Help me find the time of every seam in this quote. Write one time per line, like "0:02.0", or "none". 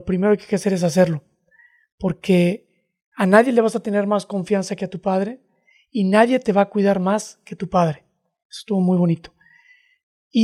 none